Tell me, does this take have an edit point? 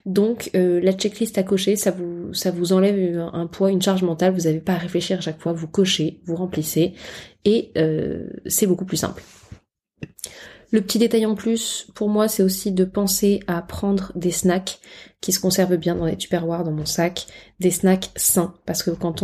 no; 0 cuts

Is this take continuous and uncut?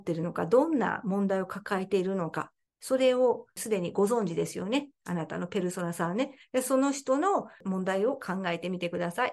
yes; 0 cuts

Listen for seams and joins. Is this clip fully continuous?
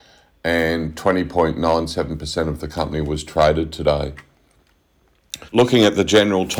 no; 1 cut; at 5.5 s

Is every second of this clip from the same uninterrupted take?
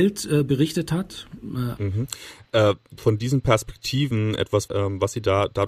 no; 3 cuts; at 1.8 s, 3.0 s, 4.7 s

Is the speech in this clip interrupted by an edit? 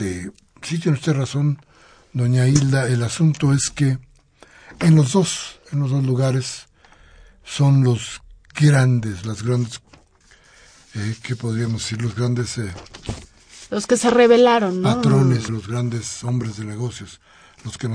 yes; 1 cut; at 15.5 s

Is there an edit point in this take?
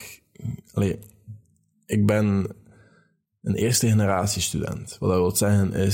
no; 0 cuts

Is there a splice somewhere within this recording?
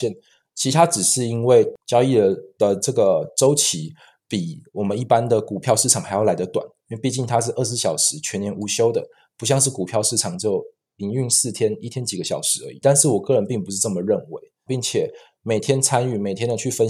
yes; 2 cuts; at 12.8 s, 14.7 s

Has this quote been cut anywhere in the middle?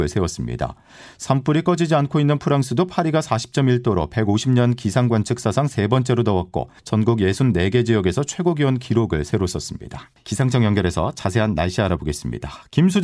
yes; 1 cut; at 10.2 s

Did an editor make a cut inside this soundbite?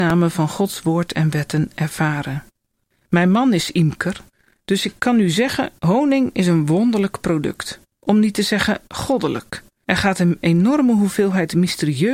no; 0 cuts

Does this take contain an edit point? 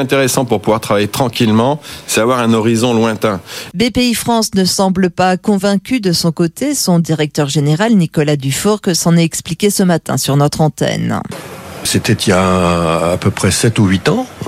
yes; 2 cuts; at 3.7 s, 11.9 s

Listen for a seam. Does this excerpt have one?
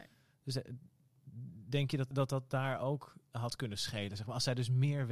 yes; 1 cut; at 2.1 s

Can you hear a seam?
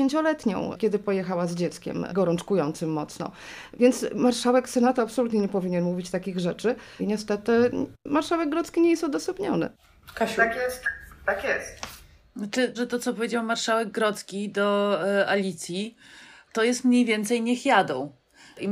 yes; 2 cuts; at 7.0 s, 12.8 s

